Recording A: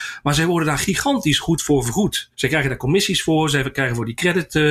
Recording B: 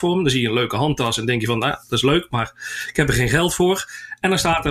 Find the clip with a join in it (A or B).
A